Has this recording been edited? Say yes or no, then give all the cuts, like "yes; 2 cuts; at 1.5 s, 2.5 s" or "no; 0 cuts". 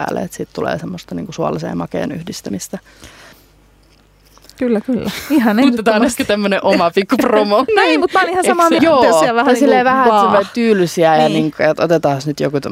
yes; 3 cuts; at 3.3 s, 7.7 s, 8.8 s